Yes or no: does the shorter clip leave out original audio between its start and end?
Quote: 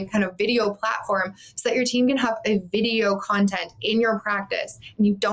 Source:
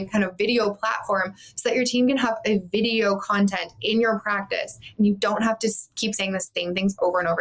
no